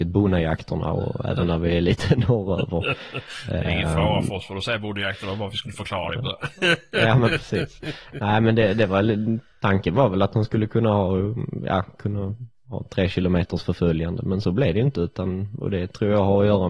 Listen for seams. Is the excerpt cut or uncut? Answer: uncut